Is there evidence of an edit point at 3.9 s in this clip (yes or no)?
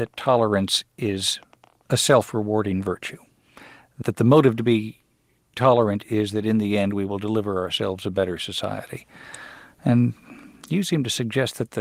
no